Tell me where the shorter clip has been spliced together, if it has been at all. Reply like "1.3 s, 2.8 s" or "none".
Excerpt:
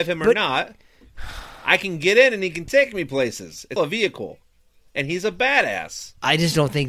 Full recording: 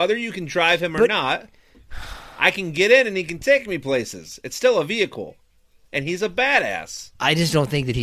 3.8 s